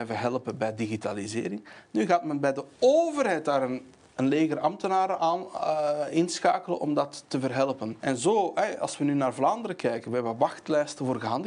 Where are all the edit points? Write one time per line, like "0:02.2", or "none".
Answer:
0:08.0